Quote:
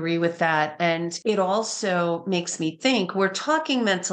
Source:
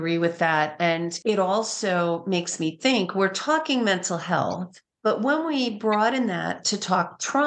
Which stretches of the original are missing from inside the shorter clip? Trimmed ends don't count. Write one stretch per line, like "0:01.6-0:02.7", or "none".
none